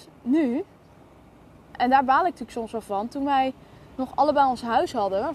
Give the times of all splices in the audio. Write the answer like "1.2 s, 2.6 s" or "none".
none